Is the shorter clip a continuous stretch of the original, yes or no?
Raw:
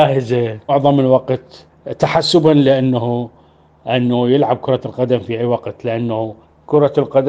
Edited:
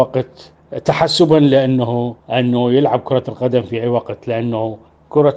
no